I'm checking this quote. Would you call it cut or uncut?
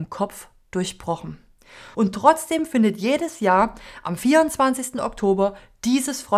cut